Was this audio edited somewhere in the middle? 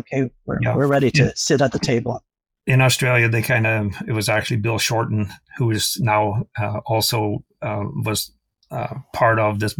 no; 0 cuts

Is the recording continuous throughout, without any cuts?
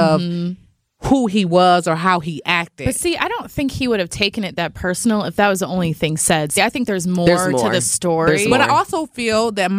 yes; 0 cuts

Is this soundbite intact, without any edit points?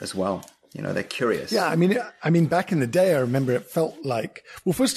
yes; 0 cuts

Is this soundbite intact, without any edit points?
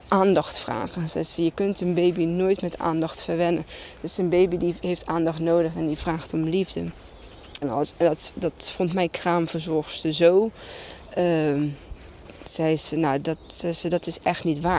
no; 1 cut; at 7.6 s

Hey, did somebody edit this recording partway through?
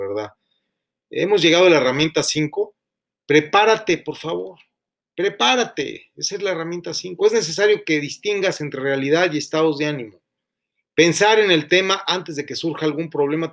no; 0 cuts

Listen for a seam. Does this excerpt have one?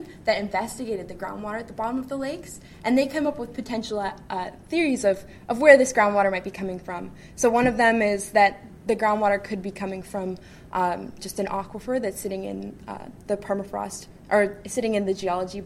no; 0 cuts

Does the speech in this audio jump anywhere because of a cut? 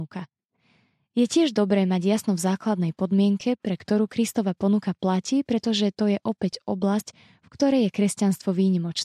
no; 0 cuts

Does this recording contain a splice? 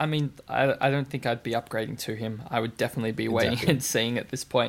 no; 0 cuts

